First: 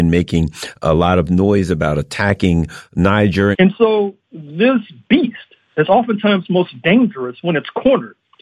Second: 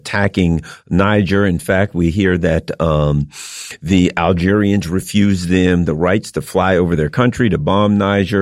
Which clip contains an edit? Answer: first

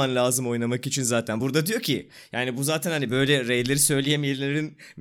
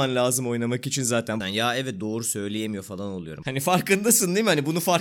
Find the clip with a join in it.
second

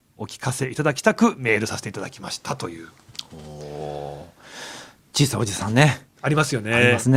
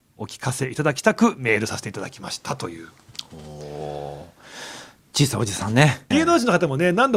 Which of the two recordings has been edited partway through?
second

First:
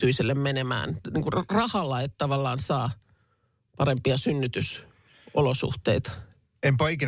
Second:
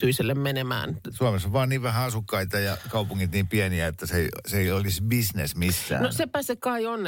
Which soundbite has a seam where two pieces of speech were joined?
second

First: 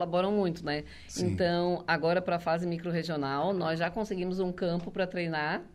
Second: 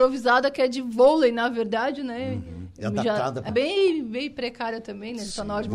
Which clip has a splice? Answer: second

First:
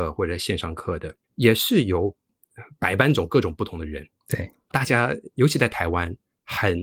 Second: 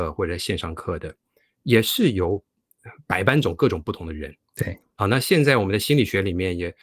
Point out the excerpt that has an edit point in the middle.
first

